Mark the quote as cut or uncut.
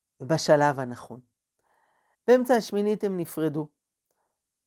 cut